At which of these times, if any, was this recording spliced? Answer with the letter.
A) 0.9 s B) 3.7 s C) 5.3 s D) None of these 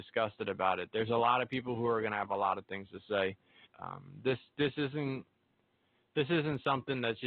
B